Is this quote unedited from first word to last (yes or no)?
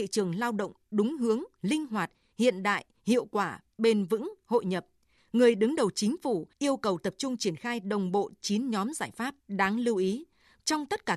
no